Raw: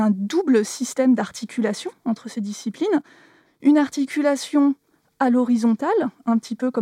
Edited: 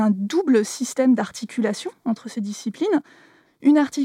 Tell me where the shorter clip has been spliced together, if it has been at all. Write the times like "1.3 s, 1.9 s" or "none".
none